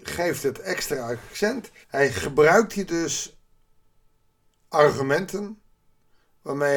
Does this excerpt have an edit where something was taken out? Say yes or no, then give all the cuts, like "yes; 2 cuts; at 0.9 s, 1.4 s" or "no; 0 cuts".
yes; 1 cut; at 1.8 s